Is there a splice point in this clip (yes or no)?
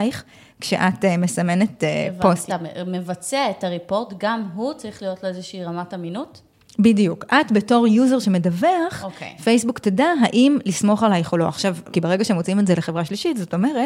yes